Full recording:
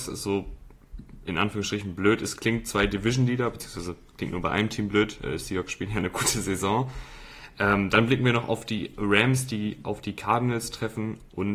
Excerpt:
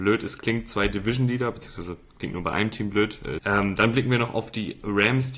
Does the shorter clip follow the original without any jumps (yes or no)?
no